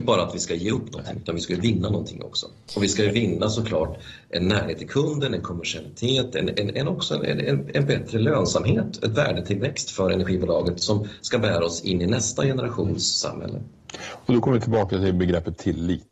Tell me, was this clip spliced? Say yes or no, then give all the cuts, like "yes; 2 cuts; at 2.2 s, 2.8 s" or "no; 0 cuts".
no; 0 cuts